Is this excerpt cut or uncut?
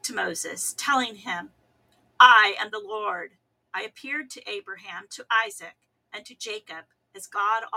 uncut